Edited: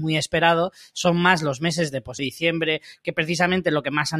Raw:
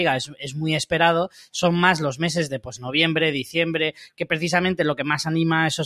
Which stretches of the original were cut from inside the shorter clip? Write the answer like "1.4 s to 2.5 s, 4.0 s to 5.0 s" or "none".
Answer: 2.8 s to 3.3 s